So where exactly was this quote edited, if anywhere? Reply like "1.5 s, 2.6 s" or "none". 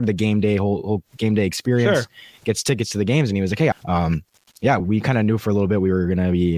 3.7 s, 4.8 s